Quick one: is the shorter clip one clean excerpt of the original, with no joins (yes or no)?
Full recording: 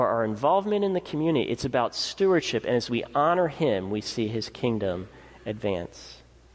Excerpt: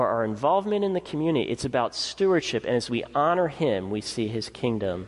yes